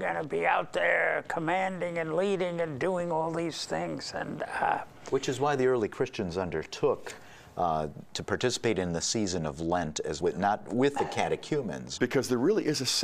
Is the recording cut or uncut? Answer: cut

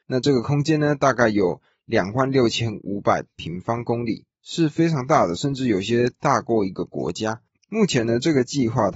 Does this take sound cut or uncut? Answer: uncut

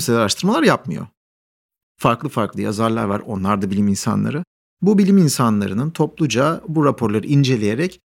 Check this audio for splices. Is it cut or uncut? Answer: cut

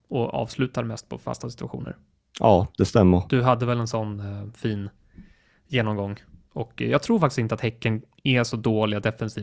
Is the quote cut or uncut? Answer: cut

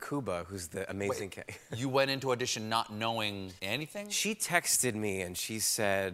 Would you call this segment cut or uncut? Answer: cut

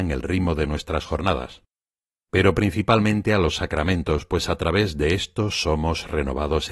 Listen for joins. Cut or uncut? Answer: uncut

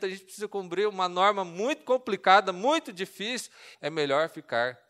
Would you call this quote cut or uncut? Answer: cut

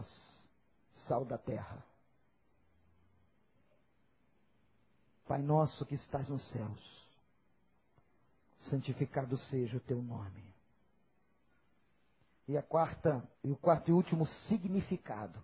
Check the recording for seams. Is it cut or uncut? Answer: cut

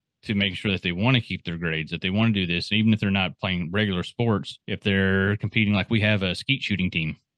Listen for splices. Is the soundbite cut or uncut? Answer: cut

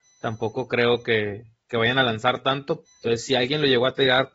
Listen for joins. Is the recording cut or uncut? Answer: cut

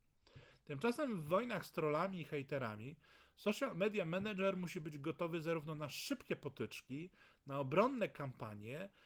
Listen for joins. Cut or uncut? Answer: uncut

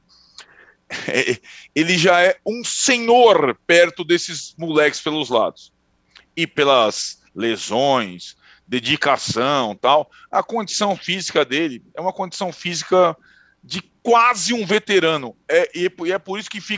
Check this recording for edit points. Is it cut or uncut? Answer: uncut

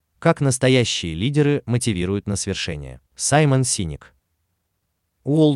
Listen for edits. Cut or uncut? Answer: cut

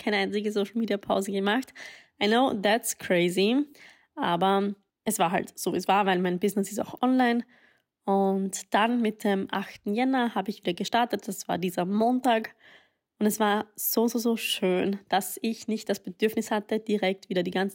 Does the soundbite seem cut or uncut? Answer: uncut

